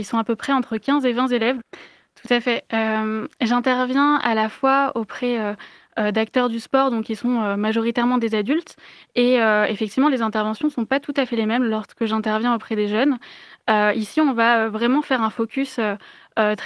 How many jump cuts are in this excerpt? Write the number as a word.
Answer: one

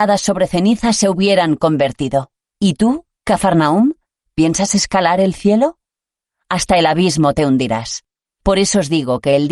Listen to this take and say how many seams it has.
two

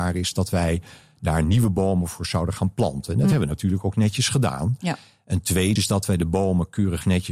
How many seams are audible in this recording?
one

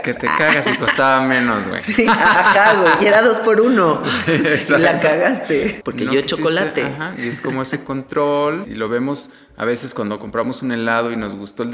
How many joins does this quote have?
two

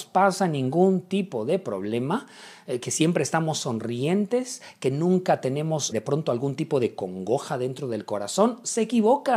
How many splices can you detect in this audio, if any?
one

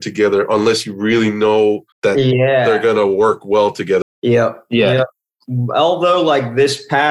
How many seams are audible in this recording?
two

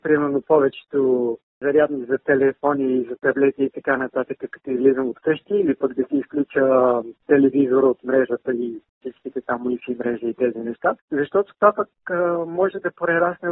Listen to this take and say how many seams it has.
zero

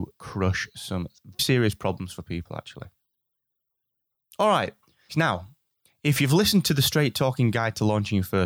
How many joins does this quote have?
two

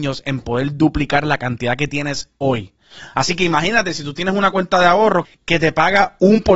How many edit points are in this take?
two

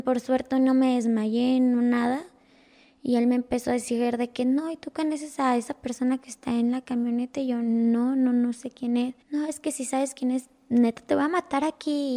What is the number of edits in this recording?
one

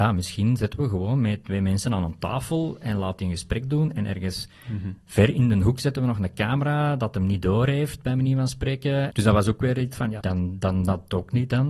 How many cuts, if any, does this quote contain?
two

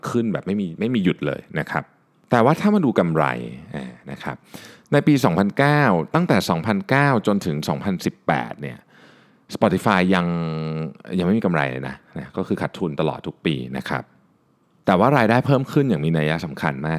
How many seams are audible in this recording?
zero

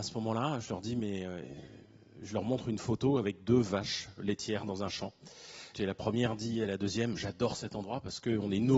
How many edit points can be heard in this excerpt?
one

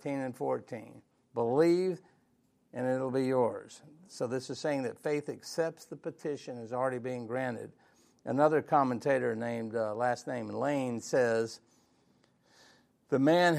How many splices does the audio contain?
one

